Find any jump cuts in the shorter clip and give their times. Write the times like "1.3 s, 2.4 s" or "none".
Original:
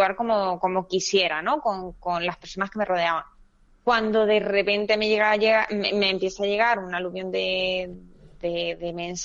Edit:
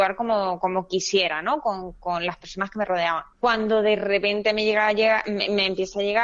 3.3 s